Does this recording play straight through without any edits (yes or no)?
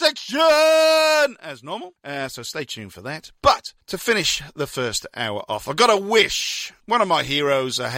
yes